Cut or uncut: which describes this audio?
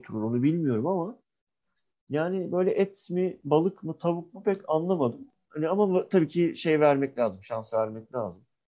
uncut